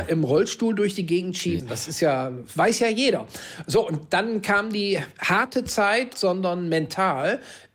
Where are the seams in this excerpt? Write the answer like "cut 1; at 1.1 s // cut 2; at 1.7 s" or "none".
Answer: cut 1; at 1.6 s // cut 2; at 6.1 s